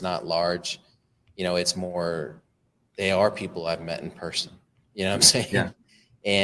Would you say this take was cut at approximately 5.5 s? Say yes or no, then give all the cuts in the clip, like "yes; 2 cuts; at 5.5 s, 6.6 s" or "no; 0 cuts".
no; 0 cuts